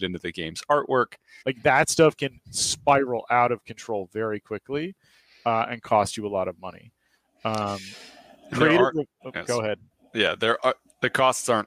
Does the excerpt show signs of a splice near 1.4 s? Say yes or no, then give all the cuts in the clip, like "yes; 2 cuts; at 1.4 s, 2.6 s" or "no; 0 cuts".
yes; 1 cut; at 1.4 s